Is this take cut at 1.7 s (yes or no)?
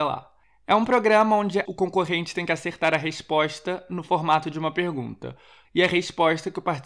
yes